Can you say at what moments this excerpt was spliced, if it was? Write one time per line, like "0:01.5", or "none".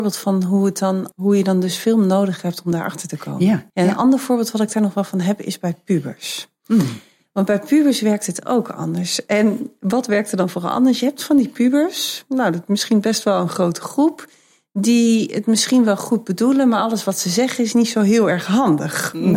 0:01.1
0:03.7